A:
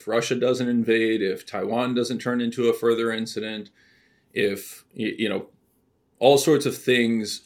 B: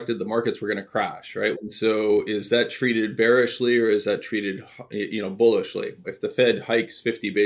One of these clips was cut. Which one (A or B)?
B